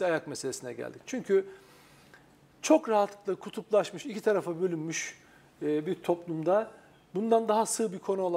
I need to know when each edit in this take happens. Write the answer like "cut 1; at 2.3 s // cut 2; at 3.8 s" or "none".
none